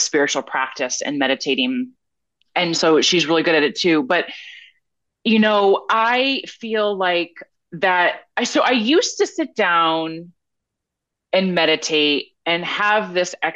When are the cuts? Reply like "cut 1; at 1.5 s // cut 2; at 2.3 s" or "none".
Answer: none